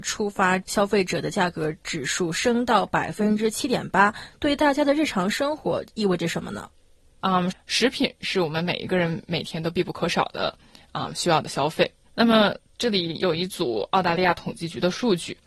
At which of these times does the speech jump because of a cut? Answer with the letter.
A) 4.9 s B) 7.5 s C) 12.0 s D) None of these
B